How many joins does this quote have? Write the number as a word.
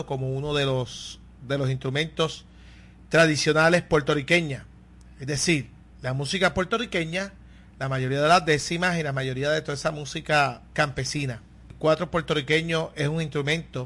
one